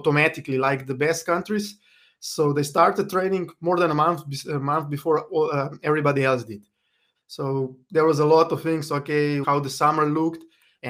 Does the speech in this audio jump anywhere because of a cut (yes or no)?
yes